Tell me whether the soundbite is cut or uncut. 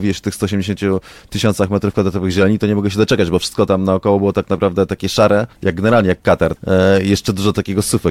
cut